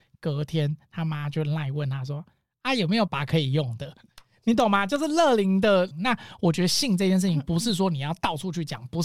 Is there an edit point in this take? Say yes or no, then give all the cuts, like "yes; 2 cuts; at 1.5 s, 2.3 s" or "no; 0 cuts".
yes; 2 cuts; at 3.1 s, 5.9 s